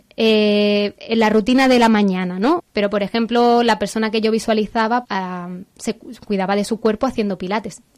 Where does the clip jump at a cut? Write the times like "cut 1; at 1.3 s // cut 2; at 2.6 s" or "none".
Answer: cut 1; at 2.6 s // cut 2; at 5.0 s